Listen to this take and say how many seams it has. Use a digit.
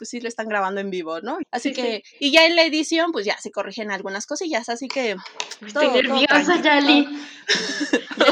1